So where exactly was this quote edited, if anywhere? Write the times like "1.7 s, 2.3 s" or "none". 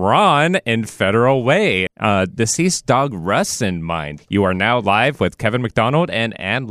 1.9 s, 4.2 s